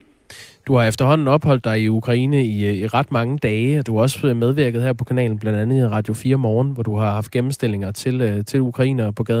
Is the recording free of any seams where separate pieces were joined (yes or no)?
yes